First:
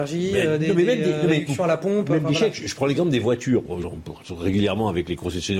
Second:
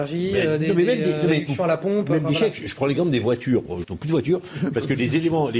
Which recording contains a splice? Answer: second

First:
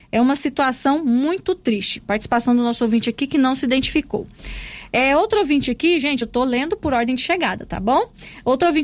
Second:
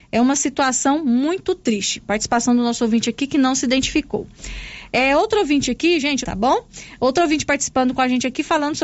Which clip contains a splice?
second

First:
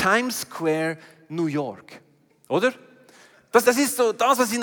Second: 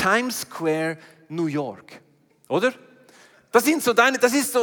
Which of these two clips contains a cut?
first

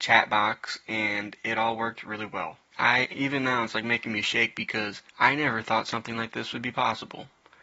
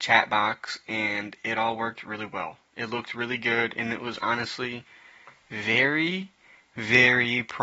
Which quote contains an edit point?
first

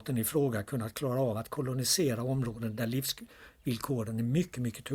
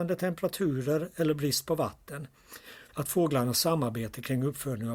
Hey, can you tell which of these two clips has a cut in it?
second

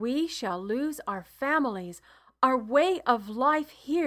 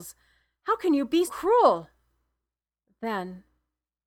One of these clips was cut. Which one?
second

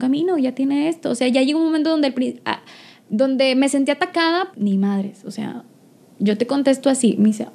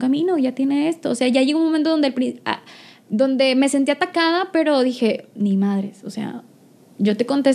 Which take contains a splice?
first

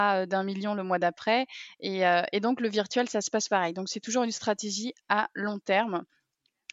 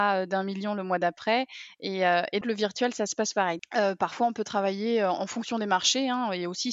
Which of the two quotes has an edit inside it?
second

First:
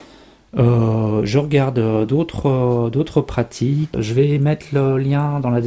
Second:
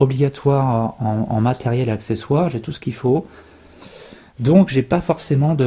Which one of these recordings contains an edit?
first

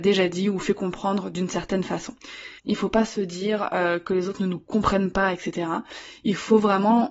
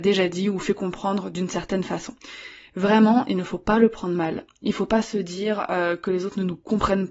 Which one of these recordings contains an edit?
first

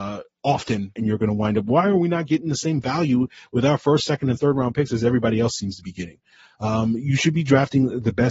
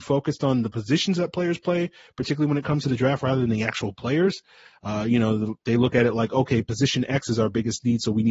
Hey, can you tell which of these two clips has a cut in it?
first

